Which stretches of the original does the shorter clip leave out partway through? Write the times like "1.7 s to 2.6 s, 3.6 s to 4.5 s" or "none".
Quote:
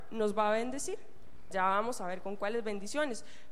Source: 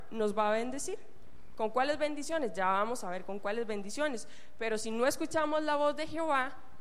1.5 s to 2.5 s